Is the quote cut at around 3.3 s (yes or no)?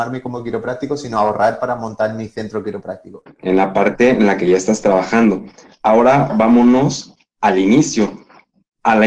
yes